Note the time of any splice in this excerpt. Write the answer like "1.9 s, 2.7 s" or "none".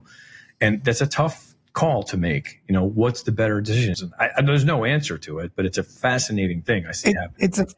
3.9 s